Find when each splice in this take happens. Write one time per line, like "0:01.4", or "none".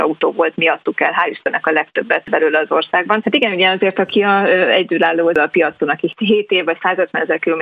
0:03.2